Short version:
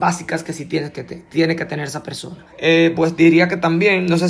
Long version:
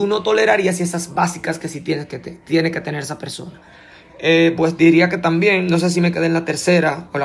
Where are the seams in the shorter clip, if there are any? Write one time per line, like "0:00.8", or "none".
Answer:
0:02.5